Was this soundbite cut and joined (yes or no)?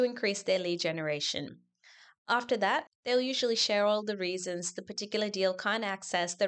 yes